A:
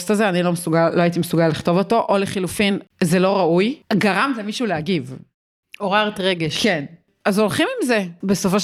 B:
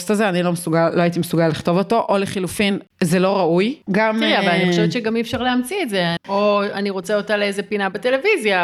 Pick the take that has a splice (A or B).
B